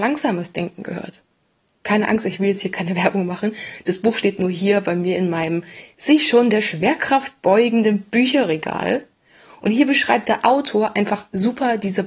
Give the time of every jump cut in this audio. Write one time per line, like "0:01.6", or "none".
none